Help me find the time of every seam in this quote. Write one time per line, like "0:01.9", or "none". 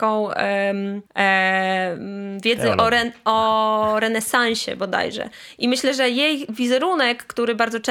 0:01.1